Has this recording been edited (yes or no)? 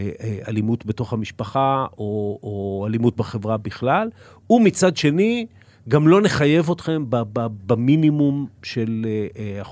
no